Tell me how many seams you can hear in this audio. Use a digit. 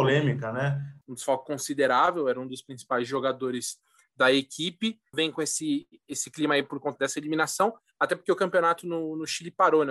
3